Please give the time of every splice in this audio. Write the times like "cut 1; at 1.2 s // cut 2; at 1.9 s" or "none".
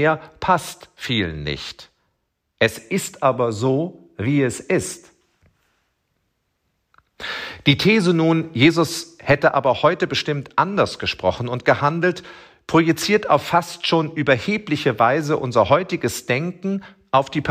none